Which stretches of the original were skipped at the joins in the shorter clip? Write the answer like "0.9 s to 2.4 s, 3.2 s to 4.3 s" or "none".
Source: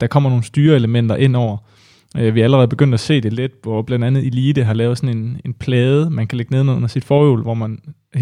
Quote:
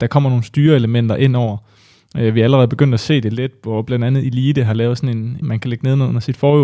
5.4 s to 6.1 s